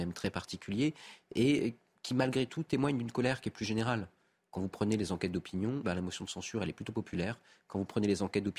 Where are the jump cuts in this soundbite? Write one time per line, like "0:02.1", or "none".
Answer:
0:05.8